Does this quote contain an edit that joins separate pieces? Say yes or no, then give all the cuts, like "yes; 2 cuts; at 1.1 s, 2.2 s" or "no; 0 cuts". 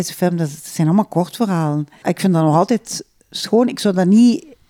yes; 1 cut; at 2.0 s